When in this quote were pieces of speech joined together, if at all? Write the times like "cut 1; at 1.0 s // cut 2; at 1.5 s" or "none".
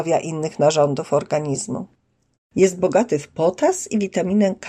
cut 1; at 2.3 s